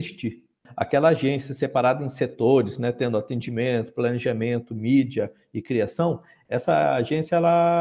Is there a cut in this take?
no; 0 cuts

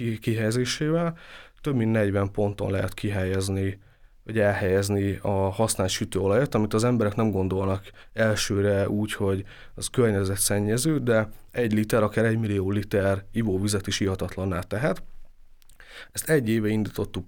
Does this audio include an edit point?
no; 0 cuts

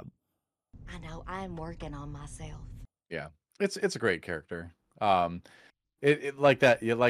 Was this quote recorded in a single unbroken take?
yes; 0 cuts

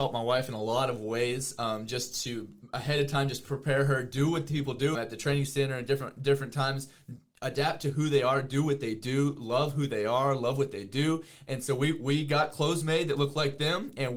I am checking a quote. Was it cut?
yes; 1 cut; at 4.9 s

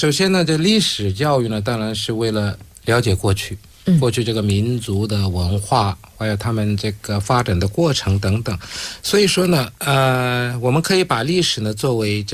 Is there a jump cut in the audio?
no; 0 cuts

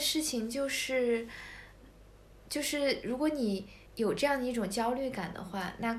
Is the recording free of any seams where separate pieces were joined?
no; 1 cut; at 3.9 s

